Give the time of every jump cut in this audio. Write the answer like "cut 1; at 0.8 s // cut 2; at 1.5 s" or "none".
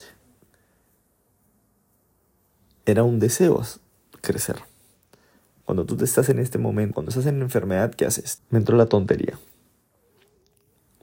cut 1; at 5.6 s // cut 2; at 6.9 s // cut 3; at 8.4 s

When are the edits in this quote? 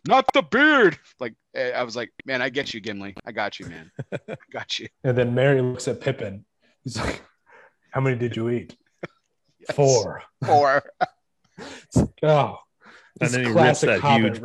cut 1; at 4.9 s

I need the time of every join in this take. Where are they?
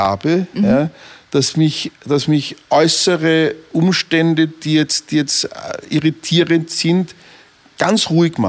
none

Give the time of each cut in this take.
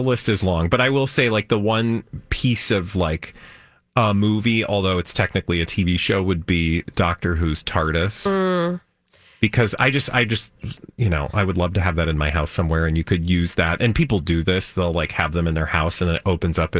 none

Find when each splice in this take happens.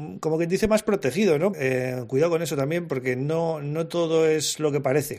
cut 1; at 1.5 s

